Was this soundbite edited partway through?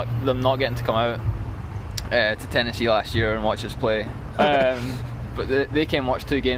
yes; 1 cut; at 4.3 s

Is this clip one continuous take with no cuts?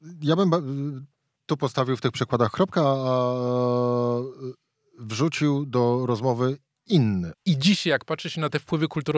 no; 1 cut; at 7.3 s

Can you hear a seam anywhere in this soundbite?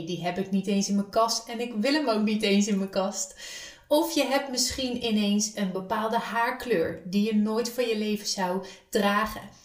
no; 0 cuts

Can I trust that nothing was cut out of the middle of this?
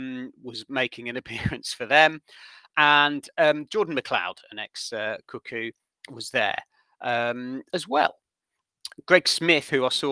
yes; 0 cuts

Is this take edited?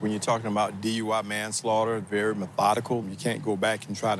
yes; 2 cuts; at 2.0 s, 3.0 s

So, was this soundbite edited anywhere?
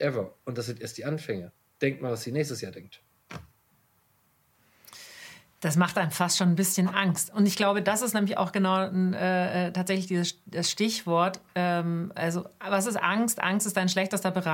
no; 0 cuts

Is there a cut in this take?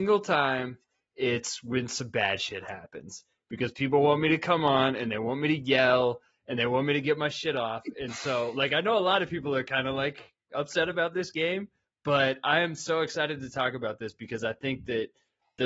no; 0 cuts

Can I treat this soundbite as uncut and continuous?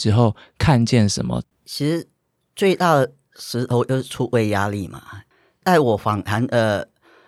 no; 1 cut; at 1.5 s

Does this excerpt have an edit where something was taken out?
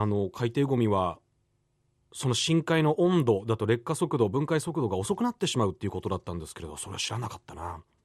no; 0 cuts

